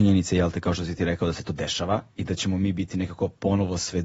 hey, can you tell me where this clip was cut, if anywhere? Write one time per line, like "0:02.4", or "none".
0:02.1